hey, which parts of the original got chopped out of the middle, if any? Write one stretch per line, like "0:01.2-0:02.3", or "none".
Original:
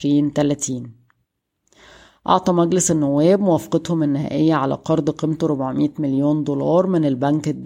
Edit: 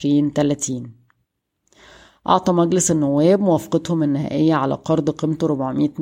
none

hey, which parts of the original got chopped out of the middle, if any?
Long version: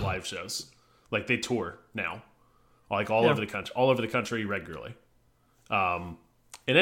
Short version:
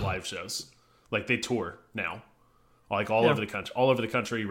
none

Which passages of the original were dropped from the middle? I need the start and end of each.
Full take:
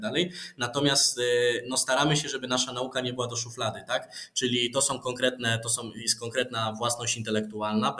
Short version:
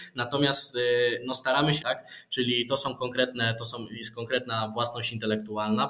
0:02.2-0:03.9

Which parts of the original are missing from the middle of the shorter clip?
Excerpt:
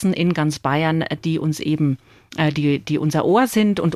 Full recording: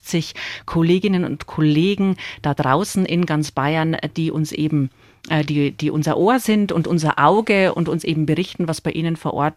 none

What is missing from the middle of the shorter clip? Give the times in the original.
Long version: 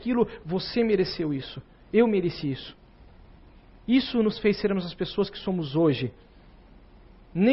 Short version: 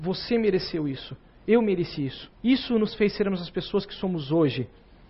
0:02.8-0:03.8

